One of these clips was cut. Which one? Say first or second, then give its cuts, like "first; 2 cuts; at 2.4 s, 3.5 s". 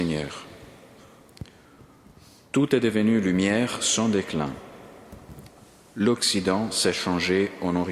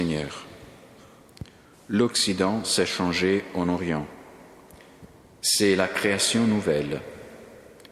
second; 1 cut; at 1.7 s